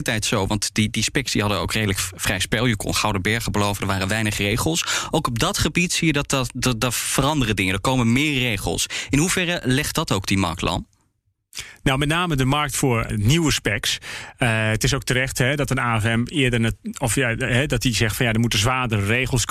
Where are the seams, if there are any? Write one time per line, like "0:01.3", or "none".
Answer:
0:13.1